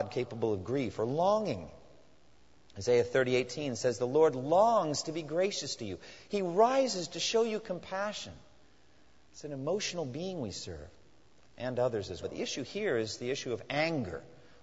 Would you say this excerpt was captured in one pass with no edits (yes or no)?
no